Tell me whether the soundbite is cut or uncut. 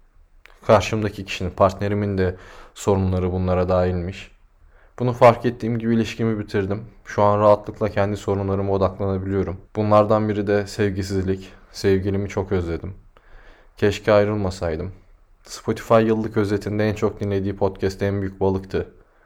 cut